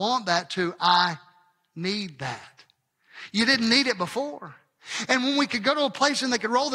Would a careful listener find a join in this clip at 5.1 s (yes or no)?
yes